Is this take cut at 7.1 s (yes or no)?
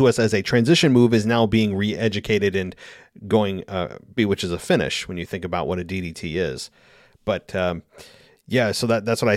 no